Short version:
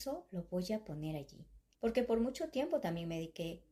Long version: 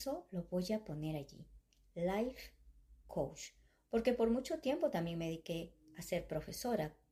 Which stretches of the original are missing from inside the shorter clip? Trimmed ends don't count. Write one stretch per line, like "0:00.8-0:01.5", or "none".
0:01.7-0:03.8